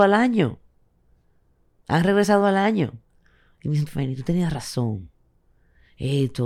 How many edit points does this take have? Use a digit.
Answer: 1